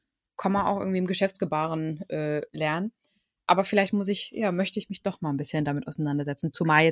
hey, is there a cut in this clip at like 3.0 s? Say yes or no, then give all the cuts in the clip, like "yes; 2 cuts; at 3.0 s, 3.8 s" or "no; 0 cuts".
no; 0 cuts